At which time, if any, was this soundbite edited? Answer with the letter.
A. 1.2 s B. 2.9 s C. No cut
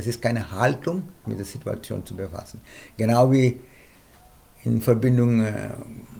A